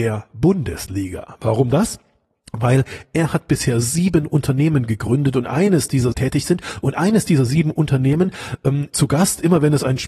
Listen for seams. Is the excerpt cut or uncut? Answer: cut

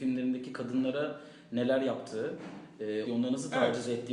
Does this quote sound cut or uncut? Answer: cut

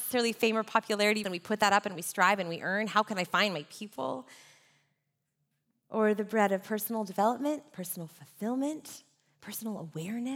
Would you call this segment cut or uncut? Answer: cut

